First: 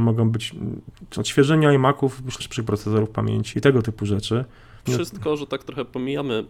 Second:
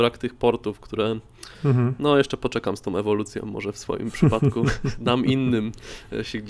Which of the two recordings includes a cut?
first; 3 cuts; at 2.4 s, 3.5 s, 4.9 s

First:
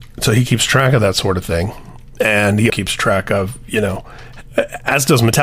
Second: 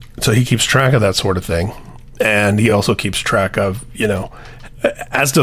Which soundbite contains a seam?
first; 1 cut; at 2.7 s

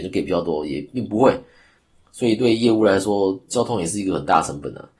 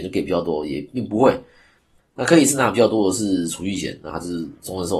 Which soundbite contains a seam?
second; 2 cuts; at 2.0 s, 4.1 s

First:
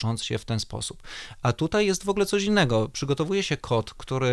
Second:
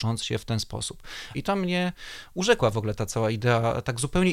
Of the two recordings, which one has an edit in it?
second; 1 cut; at 1.3 s

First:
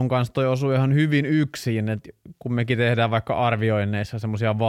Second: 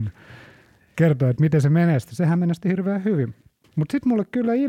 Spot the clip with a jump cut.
second; 1 cut; at 3.6 s

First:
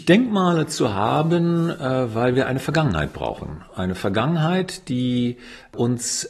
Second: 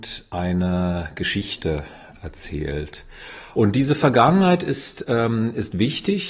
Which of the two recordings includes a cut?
second; 1 cut; at 3.5 s

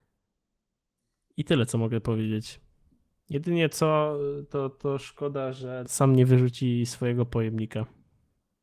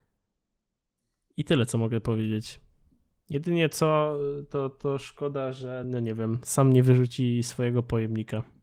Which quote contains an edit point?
first; 1 cut; at 5.8 s

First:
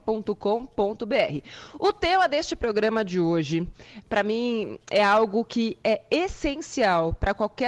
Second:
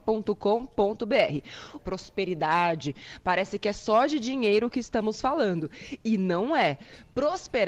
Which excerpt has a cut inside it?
second; 1 cut; at 1.8 s

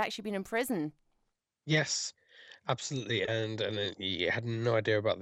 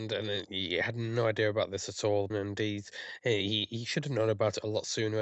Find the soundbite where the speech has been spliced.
second; 1 cut; at 2.3 s

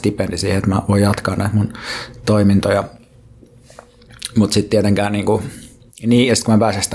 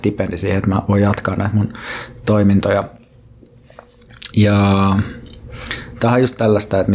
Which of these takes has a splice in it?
second; 1 cut; at 4.3 s

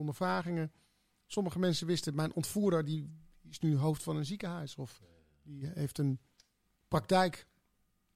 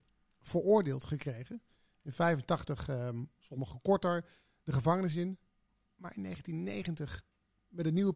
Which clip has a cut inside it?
second; 1 cut; at 3.4 s

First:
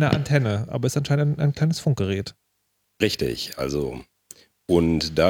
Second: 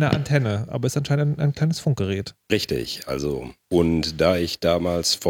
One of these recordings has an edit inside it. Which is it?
second; 2 cuts; at 2.4 s, 3.6 s

